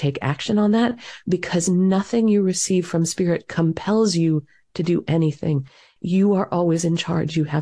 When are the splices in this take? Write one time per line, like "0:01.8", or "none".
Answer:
none

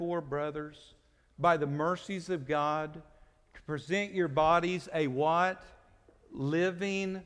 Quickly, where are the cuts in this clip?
none

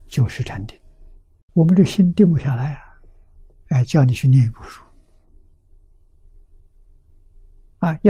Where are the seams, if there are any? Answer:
0:01.4

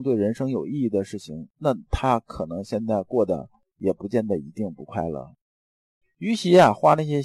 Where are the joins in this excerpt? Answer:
0:06.0

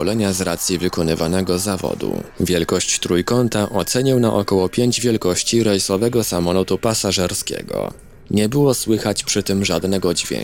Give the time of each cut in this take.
none

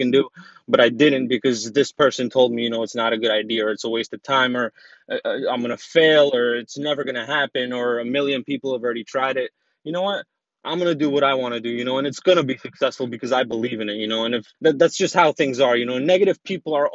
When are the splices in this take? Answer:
0:10.4
0:14.5

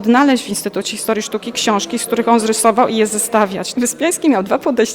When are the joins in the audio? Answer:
0:03.7

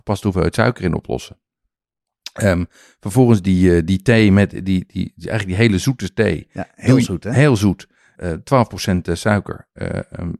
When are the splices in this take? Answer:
0:08.2

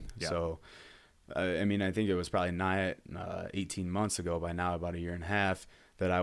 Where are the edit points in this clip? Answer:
none

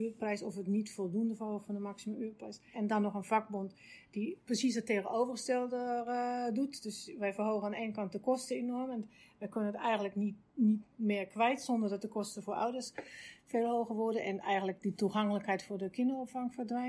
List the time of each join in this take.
0:02.7

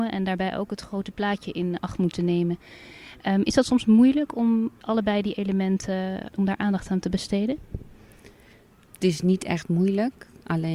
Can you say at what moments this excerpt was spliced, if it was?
none

